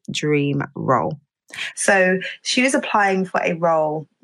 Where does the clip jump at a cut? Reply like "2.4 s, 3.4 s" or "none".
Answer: 1.7 s